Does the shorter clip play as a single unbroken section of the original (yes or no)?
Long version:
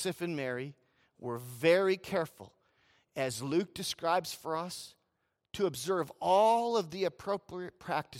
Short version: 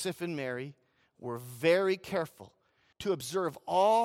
no